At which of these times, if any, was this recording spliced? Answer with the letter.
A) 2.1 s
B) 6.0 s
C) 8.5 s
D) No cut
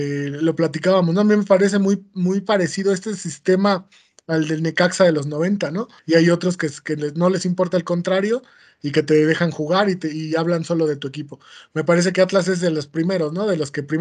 B